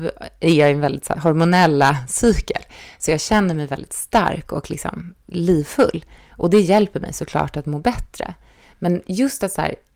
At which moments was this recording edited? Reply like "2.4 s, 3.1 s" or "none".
1.1 s